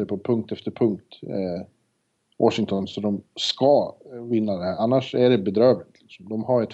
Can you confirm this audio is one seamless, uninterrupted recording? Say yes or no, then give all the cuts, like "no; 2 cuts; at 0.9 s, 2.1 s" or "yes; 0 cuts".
yes; 0 cuts